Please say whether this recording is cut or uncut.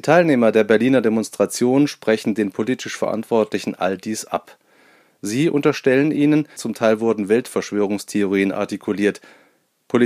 cut